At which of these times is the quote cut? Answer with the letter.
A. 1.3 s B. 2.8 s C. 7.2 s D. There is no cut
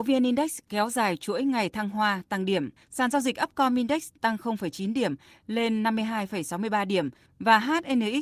B